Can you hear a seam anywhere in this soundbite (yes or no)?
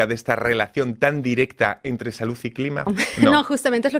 yes